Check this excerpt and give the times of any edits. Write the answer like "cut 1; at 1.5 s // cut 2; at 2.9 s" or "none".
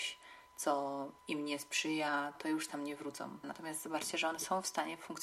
cut 1; at 1.2 s // cut 2; at 2.3 s // cut 3; at 3.4 s